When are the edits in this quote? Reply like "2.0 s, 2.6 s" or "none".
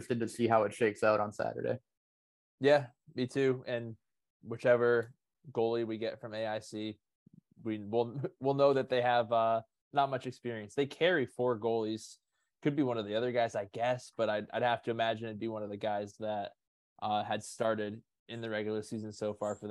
none